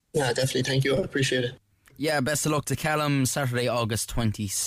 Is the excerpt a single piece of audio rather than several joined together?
yes; 0 cuts

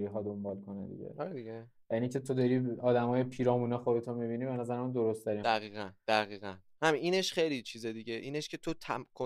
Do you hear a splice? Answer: yes; 1 cut; at 5.4 s

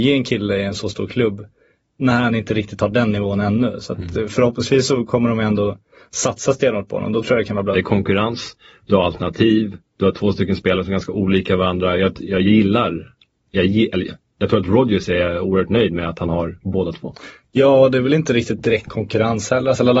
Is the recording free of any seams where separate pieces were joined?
no; 1 cut; at 7.7 s

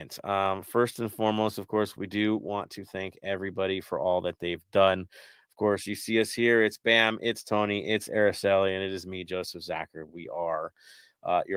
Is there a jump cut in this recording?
no; 0 cuts

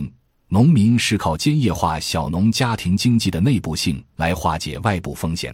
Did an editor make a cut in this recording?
no; 0 cuts

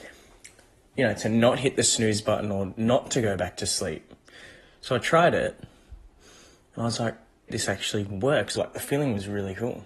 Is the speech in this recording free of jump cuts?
no; 3 cuts; at 4.6 s, 7.5 s, 8.6 s

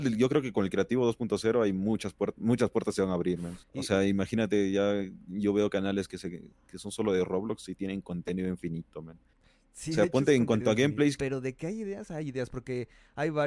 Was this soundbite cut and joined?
yes; 2 cuts; at 3.6 s, 11.2 s

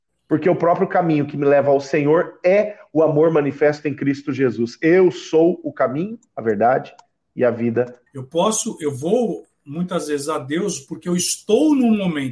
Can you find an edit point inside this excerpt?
yes; 2 cuts; at 6.3 s, 8.1 s

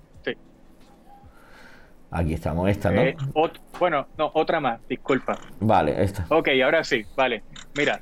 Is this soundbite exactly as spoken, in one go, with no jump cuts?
yes; 0 cuts

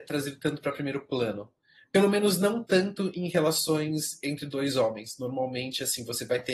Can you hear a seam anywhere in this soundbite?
no; 0 cuts

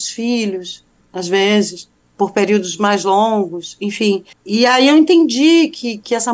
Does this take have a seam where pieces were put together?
yes; 1 cut; at 4.3 s

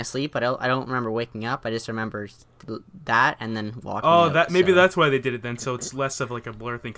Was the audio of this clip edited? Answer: no; 0 cuts

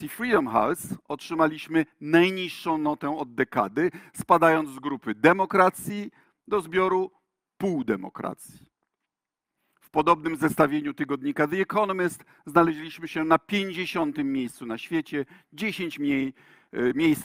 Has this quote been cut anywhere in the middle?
no; 0 cuts

